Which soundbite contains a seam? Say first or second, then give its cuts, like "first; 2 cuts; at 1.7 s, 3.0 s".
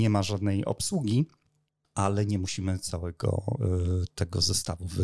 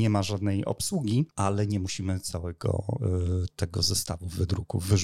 second; 1 cut; at 1.3 s